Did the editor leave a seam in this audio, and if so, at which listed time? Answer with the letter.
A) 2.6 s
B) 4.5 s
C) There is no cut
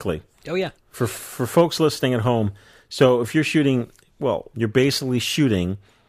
B